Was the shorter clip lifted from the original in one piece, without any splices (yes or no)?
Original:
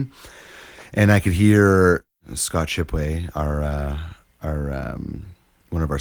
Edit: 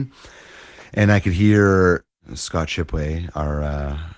yes